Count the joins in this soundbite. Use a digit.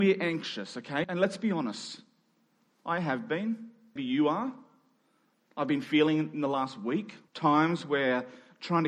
3